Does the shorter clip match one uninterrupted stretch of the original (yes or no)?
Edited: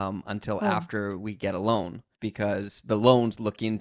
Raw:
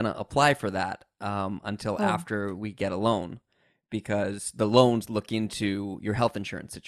no